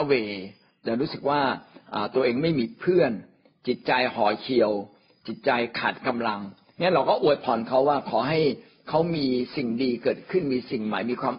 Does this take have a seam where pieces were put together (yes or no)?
no